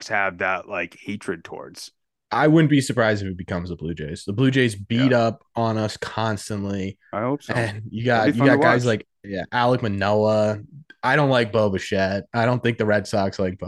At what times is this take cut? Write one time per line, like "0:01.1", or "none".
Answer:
none